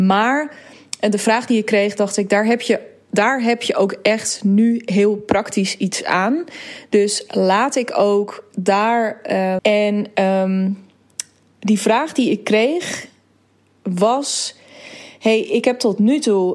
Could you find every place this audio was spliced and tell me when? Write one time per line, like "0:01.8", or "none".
0:09.6